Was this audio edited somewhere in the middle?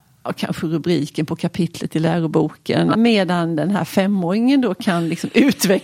yes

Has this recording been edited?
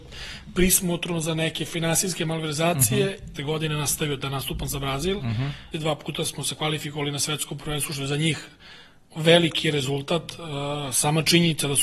yes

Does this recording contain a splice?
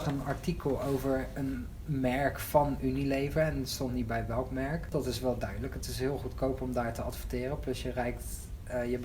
yes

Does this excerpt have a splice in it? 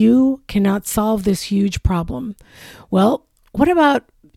no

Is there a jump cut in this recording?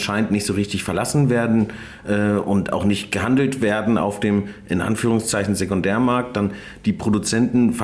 no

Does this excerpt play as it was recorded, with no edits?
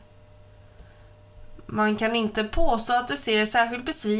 yes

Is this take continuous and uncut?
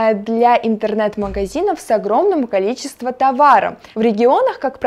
no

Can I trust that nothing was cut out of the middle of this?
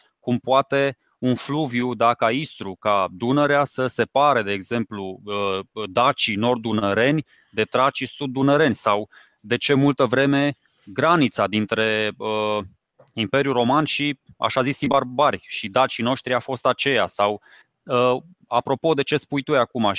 yes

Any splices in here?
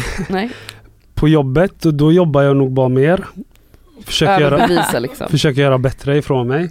no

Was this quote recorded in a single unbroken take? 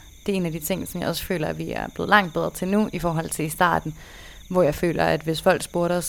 yes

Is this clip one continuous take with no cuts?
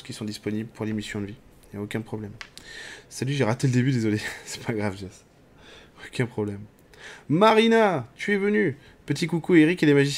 yes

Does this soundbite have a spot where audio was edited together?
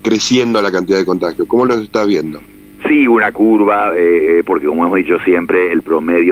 yes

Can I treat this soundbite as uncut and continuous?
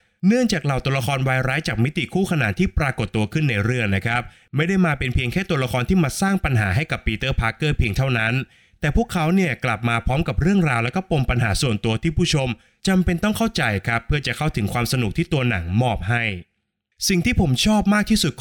yes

